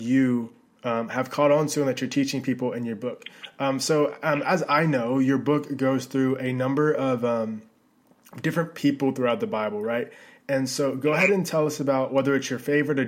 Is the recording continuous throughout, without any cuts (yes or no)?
yes